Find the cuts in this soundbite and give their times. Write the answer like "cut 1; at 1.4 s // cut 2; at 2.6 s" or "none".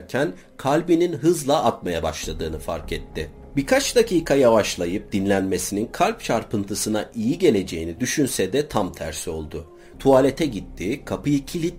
cut 1; at 9.9 s